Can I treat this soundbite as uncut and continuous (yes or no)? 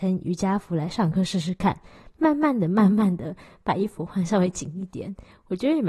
yes